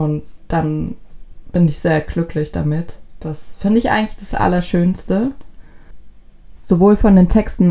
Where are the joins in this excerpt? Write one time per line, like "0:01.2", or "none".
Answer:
0:06.6